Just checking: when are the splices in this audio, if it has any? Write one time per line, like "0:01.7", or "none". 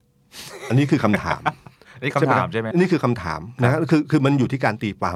0:02.7